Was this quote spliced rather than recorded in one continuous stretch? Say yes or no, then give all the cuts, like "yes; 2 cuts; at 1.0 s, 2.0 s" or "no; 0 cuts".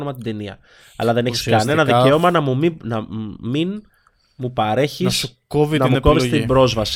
no; 0 cuts